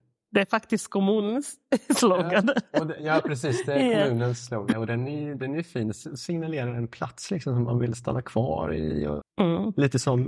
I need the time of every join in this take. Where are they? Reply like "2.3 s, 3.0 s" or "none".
4.7 s, 9.2 s